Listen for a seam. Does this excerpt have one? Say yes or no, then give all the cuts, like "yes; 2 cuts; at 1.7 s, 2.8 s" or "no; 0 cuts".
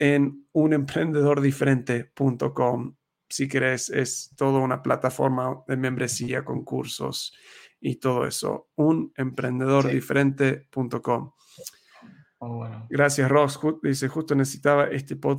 no; 0 cuts